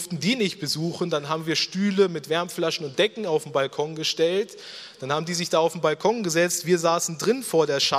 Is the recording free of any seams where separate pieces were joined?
yes; 0 cuts

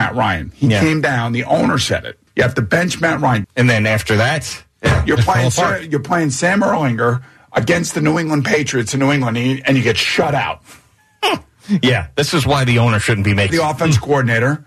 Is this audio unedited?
no; 3 cuts; at 2.3 s, 3.4 s, 13.5 s

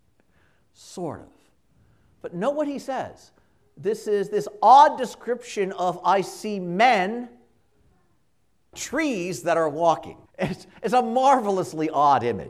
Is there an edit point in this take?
yes; 2 cuts; at 8.7 s, 10.3 s

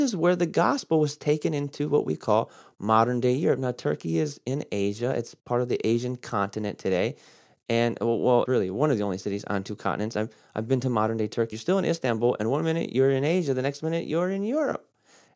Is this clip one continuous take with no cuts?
no; 2 cuts; at 8.5 s, 11.5 s

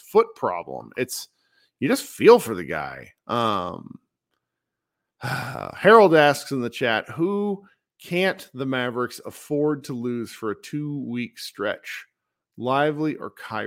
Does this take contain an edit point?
no; 0 cuts

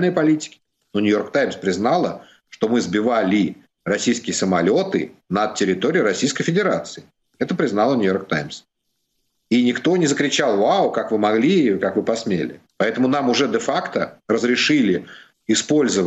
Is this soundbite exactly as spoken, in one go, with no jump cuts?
no; 2 cuts; at 12.7 s, 14.2 s

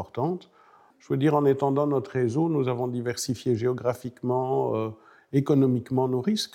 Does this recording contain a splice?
yes; 1 cut; at 0.9 s

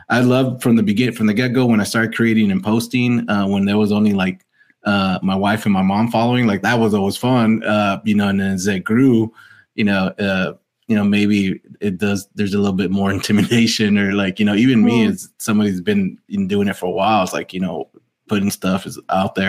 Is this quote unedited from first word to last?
yes; 0 cuts

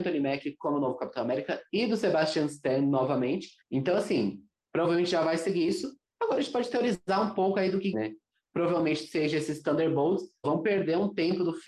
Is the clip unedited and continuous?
no; 3 cuts; at 3.6 s, 7.9 s, 10.4 s

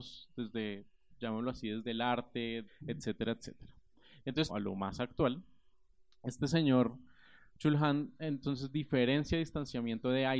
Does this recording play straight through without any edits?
no; 2 cuts; at 2.7 s, 4.5 s

